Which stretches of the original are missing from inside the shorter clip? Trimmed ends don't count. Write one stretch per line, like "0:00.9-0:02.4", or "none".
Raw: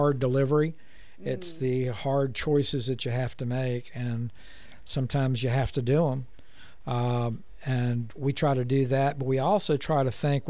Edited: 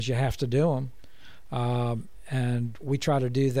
none